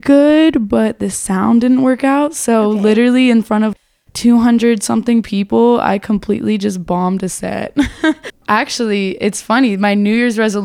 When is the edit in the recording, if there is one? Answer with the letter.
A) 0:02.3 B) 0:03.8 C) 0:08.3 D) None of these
C